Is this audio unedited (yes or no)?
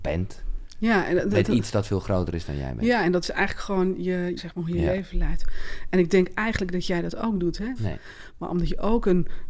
no